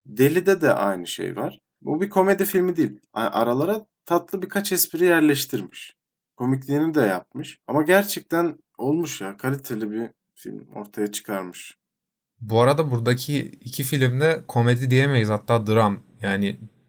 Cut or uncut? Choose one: uncut